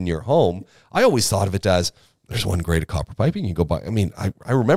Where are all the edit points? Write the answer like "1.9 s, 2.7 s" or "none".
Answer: 1.6 s